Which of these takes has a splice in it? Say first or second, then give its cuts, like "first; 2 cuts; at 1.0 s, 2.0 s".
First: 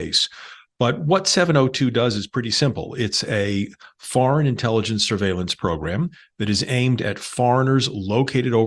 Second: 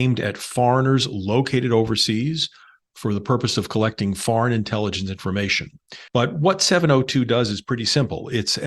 second; 1 cut; at 6.1 s